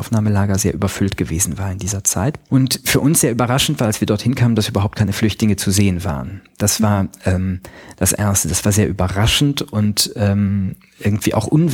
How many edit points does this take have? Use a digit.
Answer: 0